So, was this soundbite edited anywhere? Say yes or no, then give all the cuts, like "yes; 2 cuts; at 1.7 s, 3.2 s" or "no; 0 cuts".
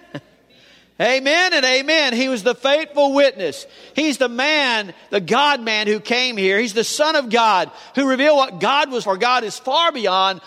yes; 1 cut; at 9.0 s